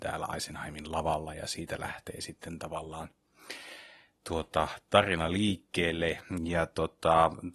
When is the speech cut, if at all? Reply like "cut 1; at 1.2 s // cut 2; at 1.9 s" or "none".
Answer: cut 1; at 6.4 s